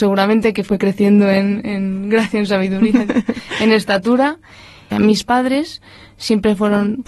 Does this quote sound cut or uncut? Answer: cut